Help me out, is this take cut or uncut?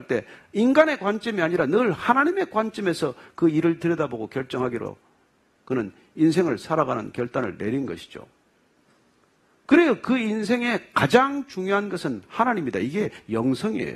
uncut